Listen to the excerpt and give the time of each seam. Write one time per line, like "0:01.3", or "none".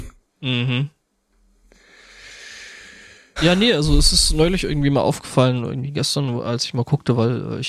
0:03.4